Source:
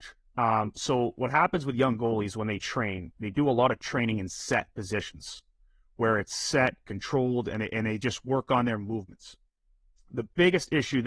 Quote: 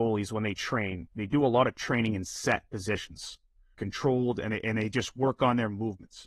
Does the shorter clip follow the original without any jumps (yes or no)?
no